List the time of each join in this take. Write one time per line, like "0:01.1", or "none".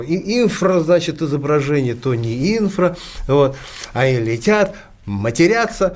none